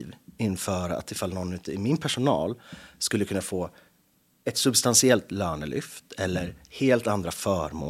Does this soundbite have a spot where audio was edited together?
no; 0 cuts

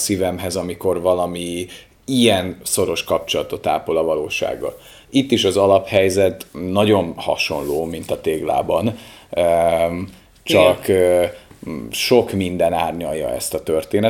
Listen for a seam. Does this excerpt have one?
no; 0 cuts

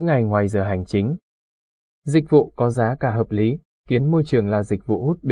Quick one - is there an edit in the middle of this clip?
yes; 2 cuts; at 1.9 s, 3.8 s

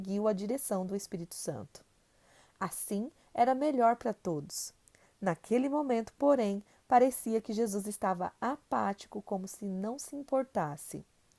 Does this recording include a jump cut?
no; 0 cuts

